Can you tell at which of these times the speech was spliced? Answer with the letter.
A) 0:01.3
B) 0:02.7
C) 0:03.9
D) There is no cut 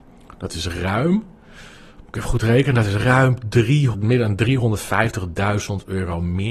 C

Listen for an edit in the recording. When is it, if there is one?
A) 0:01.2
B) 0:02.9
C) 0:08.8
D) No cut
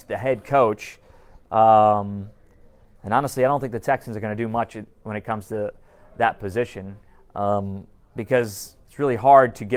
C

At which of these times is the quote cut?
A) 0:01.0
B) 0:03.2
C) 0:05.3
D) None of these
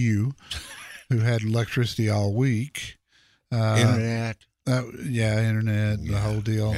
D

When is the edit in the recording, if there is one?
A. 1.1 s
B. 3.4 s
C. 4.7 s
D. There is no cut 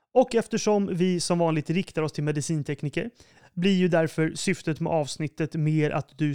B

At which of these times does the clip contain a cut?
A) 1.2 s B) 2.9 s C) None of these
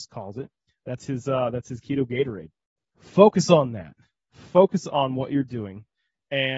B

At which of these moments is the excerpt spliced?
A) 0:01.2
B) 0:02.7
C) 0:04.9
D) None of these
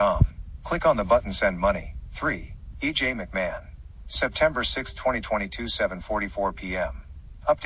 B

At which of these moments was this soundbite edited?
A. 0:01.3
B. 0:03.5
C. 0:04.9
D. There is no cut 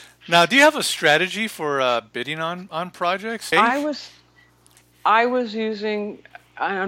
B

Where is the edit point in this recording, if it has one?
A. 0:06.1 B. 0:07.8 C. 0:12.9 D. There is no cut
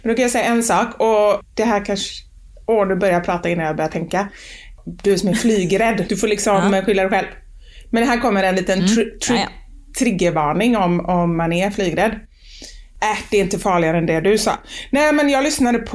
A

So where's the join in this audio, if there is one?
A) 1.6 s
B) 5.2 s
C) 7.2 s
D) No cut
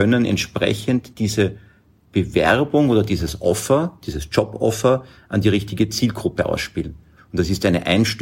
C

